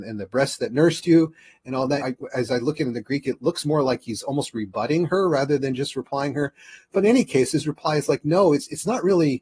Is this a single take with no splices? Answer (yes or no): no